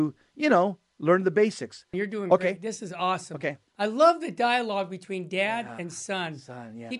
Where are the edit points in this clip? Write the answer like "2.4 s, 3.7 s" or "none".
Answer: 1.9 s